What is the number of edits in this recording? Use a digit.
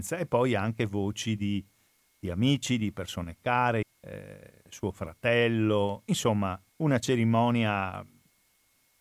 2